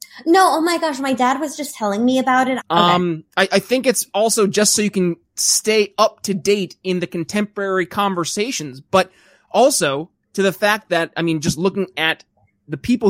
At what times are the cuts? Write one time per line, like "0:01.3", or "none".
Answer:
0:02.6